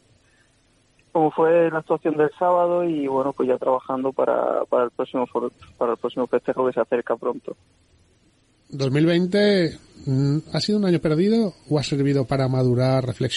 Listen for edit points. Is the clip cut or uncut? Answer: uncut